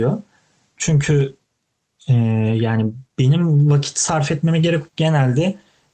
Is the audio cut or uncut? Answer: cut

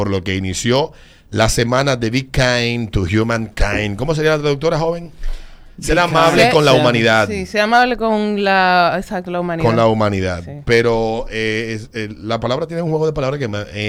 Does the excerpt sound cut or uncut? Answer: uncut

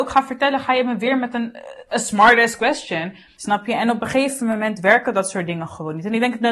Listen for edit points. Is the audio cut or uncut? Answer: cut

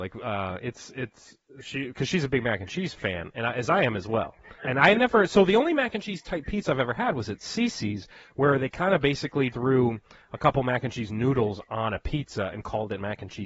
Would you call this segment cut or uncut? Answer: cut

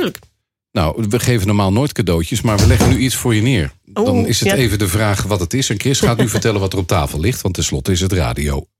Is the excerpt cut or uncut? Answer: uncut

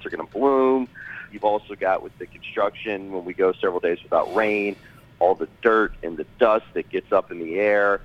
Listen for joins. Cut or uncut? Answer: cut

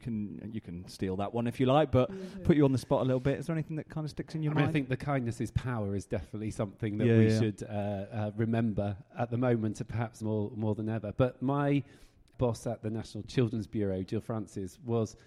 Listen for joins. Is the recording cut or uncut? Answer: uncut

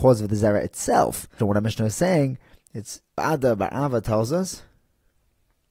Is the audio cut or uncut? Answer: cut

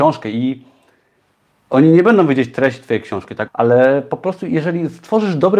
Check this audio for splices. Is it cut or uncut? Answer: cut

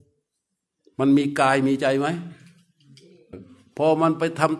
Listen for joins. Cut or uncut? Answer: cut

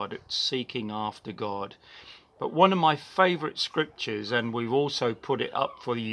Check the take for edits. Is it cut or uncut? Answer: cut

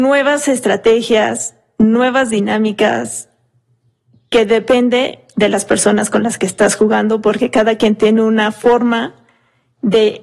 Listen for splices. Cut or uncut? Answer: uncut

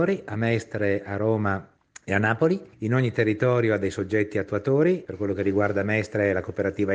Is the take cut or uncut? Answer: cut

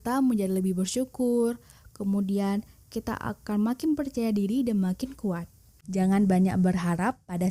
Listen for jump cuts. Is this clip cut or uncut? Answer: cut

